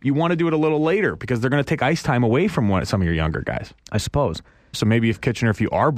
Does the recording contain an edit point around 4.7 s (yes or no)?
yes